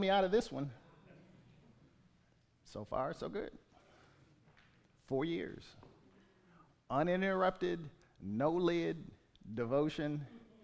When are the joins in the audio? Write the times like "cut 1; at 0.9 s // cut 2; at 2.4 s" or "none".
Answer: none